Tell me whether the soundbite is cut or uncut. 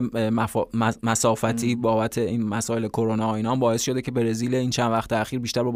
uncut